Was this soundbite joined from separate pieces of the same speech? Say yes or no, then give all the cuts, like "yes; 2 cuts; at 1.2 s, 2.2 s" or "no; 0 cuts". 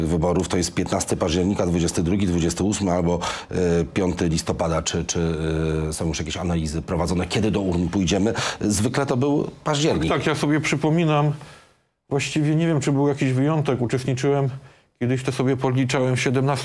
no; 0 cuts